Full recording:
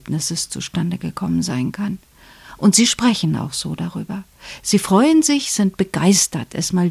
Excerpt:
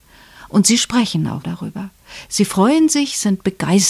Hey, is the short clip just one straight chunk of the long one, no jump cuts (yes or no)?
no